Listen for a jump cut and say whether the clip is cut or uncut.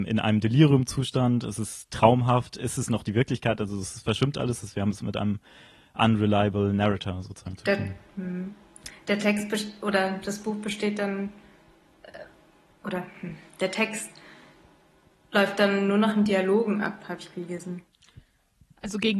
uncut